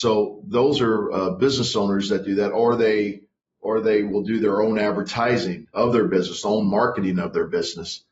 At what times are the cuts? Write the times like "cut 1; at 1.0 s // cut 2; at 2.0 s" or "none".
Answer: cut 1; at 5.7 s